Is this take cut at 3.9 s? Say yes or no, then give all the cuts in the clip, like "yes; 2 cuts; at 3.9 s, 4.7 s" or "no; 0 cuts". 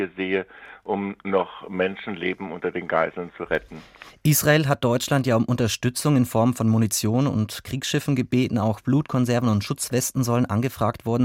no; 0 cuts